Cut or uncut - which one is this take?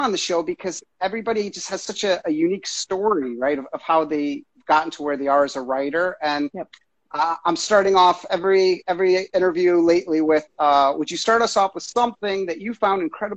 uncut